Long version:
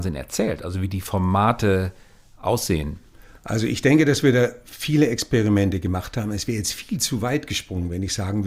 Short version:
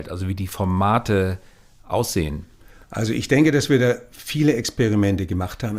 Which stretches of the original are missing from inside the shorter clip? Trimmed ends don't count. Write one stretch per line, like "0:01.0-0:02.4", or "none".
none